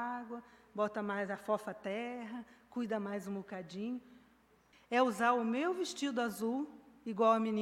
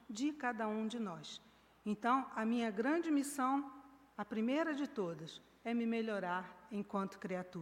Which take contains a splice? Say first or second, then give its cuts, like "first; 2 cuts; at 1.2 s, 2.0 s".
first; 1 cut; at 4.7 s